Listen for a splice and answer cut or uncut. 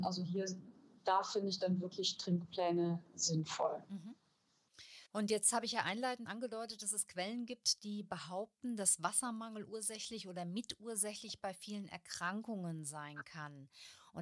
cut